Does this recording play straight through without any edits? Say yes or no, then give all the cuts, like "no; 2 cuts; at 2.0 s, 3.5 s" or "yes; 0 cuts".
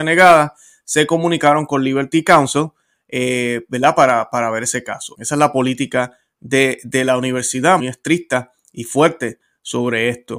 no; 2 cuts; at 5.1 s, 7.8 s